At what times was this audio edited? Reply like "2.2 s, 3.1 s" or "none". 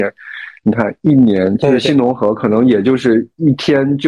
1.6 s